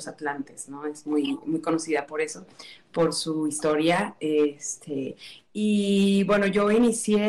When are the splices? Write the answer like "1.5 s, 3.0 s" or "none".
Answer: none